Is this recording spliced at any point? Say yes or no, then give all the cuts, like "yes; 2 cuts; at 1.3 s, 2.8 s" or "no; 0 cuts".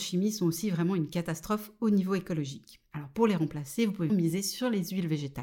yes; 1 cut; at 4.1 s